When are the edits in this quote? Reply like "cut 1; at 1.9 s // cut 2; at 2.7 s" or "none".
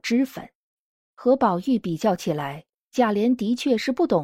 cut 1; at 1.0 s